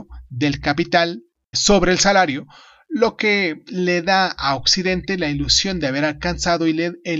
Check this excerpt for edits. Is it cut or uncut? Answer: cut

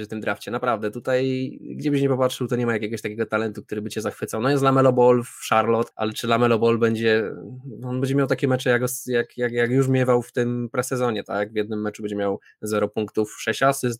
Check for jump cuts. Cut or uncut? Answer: uncut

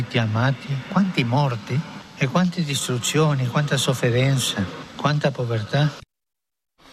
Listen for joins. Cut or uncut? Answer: uncut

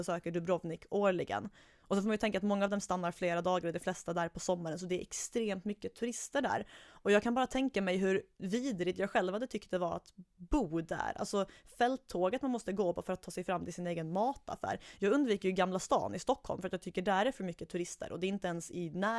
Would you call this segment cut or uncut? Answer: uncut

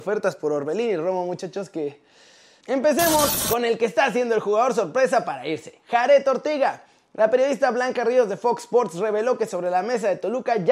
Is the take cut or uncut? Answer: cut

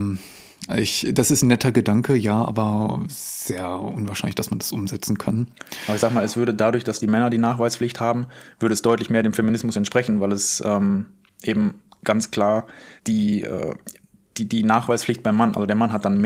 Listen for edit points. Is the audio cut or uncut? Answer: cut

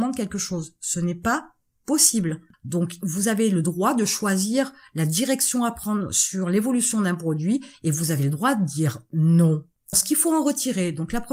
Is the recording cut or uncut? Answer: cut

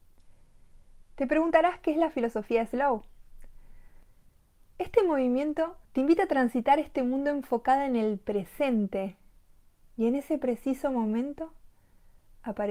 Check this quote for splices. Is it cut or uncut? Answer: cut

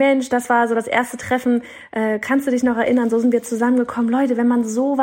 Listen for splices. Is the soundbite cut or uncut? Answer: uncut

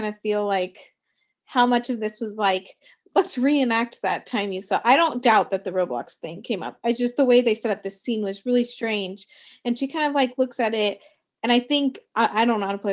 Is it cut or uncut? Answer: uncut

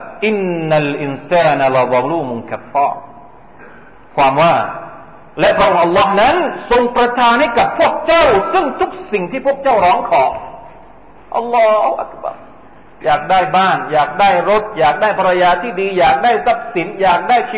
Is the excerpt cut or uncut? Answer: uncut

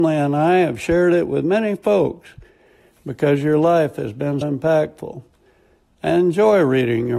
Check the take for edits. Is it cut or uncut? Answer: cut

